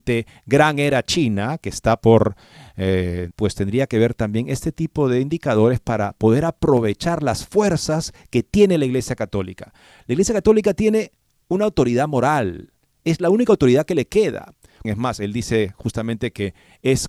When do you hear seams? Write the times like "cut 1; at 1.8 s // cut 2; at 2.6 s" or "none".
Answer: cut 1; at 3.3 s // cut 2; at 14.8 s